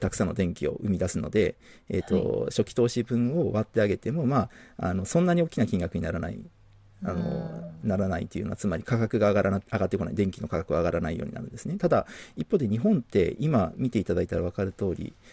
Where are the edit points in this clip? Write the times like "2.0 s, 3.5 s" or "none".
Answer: none